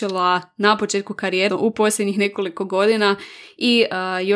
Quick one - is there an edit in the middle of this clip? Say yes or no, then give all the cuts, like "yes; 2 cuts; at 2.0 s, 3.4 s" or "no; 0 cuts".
yes; 1 cut; at 1.5 s